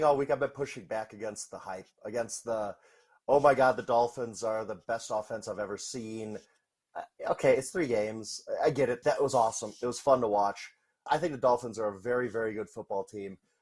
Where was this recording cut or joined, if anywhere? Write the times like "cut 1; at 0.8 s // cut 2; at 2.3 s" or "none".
cut 1; at 9.0 s // cut 2; at 11.1 s